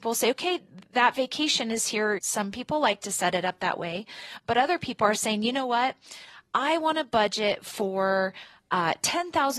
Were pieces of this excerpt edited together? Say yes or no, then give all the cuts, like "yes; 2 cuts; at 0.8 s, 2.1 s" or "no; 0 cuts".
yes; 1 cut; at 2.2 s